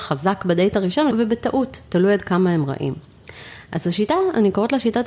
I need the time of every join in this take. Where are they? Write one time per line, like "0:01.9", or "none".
0:01.1